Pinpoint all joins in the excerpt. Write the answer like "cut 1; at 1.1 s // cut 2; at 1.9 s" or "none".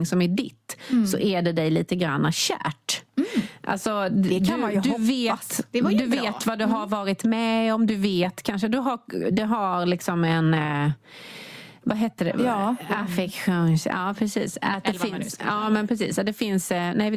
none